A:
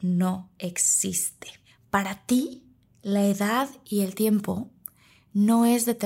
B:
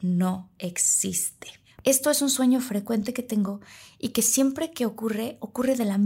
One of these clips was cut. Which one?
B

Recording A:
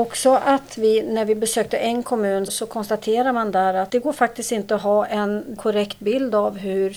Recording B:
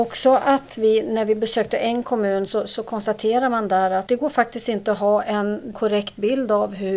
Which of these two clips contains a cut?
A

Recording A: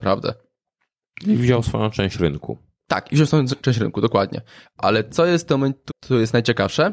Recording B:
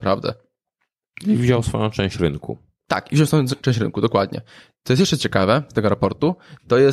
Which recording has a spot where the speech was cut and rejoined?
A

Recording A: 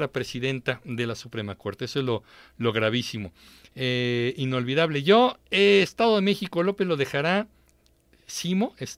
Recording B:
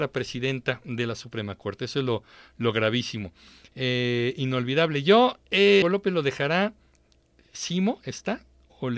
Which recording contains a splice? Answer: B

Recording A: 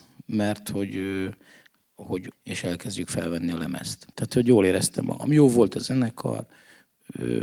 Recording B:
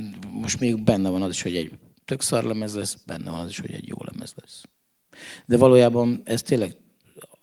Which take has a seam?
A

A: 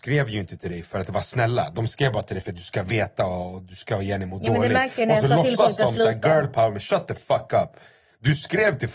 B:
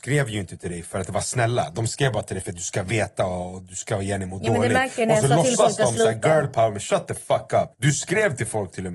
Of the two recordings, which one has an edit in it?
B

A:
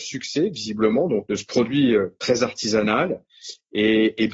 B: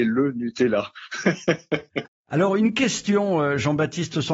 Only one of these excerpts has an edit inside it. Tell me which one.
A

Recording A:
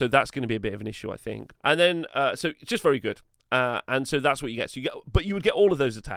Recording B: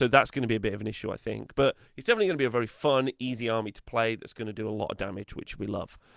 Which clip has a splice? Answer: A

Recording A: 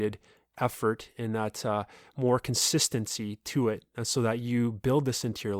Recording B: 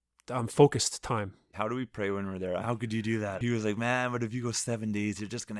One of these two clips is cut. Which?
B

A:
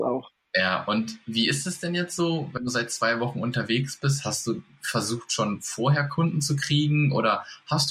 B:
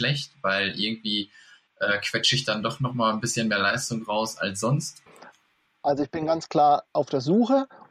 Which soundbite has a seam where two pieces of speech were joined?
B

